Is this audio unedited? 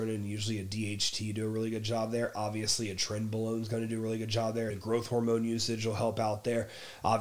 no; 1 cut; at 4.7 s

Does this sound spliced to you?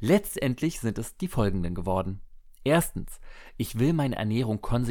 no; 0 cuts

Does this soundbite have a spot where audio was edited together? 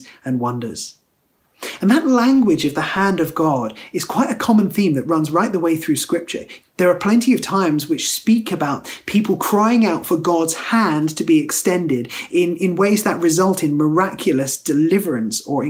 yes; 1 cut; at 6.6 s

